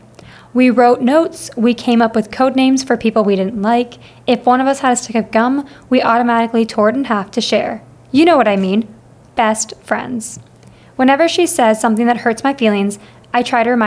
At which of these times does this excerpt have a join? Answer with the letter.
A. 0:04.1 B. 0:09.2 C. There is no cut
C